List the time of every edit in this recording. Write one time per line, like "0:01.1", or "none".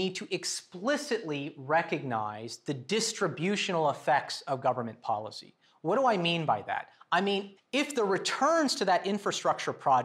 0:07.6